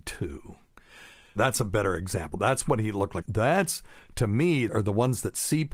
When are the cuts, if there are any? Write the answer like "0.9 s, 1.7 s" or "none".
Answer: 1.4 s, 3.2 s, 4.7 s